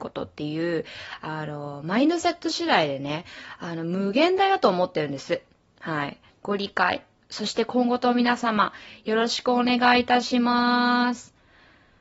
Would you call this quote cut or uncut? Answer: cut